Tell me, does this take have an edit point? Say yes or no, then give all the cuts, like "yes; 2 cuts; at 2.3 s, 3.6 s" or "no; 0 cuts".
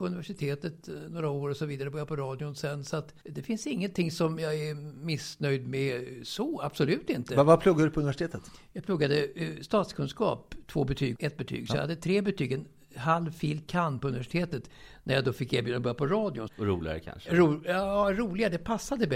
yes; 3 cuts; at 3.2 s, 11.2 s, 16.5 s